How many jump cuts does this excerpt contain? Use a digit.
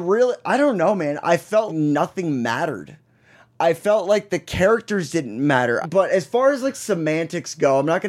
2